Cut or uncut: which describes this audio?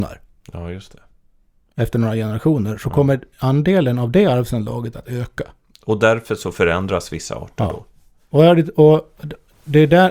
uncut